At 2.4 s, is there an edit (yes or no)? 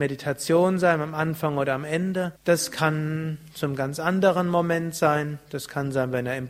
yes